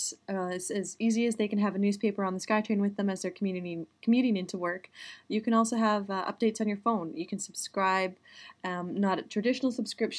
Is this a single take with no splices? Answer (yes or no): yes